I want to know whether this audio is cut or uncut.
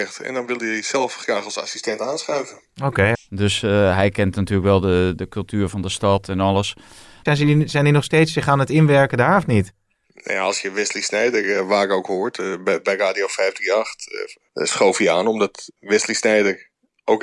cut